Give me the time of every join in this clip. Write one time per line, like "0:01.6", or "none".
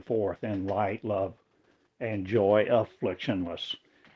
none